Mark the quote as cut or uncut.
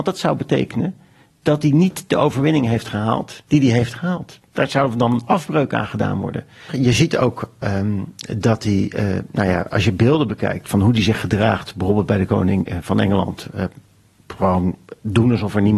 cut